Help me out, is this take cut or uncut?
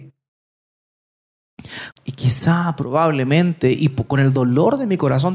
cut